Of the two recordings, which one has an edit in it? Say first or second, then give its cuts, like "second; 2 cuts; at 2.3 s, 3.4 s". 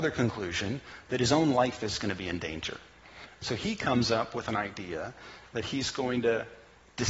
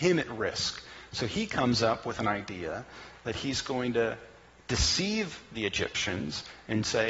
first; 1 cut; at 3.4 s